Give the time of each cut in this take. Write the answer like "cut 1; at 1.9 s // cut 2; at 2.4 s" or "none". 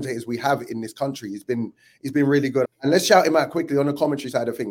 cut 1; at 2.6 s